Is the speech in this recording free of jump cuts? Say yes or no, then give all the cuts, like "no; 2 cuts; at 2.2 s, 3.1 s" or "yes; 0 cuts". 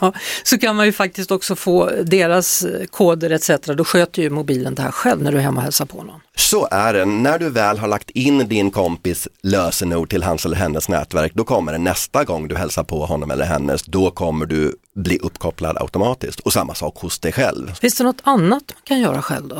no; 1 cut; at 17.8 s